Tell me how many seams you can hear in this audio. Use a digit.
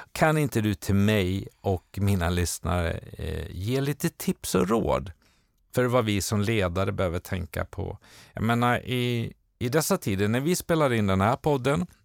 0